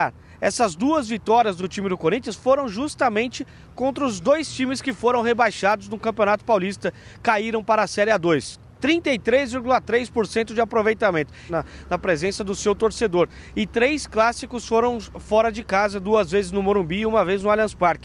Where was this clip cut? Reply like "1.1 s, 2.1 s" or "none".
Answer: 8.8 s, 11.5 s